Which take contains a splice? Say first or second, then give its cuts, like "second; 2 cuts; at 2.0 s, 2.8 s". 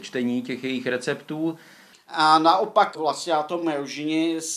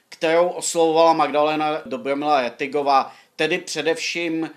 first; 1 cut; at 1.9 s